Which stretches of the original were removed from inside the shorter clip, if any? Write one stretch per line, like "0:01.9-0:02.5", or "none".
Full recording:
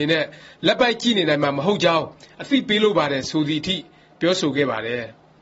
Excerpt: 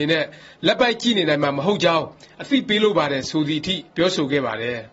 0:03.9-0:04.1